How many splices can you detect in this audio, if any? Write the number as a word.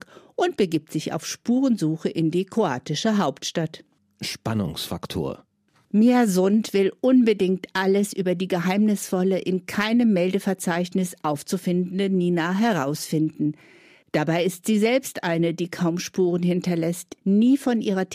one